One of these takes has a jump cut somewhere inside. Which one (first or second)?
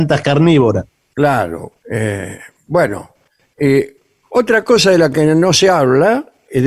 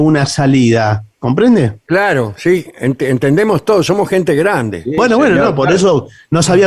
first